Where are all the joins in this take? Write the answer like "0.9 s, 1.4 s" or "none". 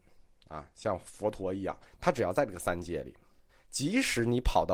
1.9 s, 3.5 s